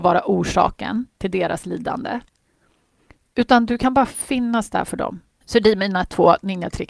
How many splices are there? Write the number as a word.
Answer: one